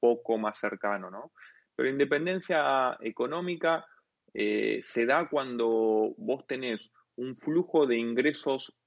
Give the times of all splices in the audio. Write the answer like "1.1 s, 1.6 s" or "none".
none